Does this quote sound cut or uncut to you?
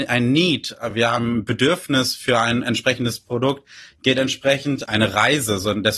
uncut